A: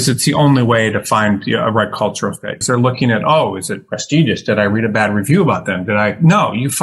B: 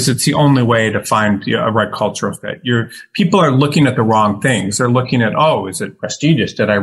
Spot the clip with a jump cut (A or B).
A